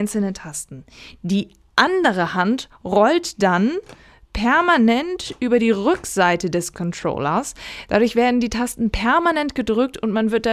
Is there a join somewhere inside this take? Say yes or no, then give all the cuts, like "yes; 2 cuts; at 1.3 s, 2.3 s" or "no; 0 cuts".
no; 0 cuts